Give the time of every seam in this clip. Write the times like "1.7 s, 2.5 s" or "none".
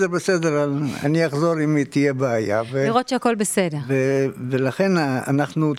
none